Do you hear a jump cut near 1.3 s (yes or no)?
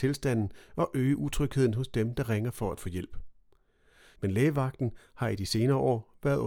no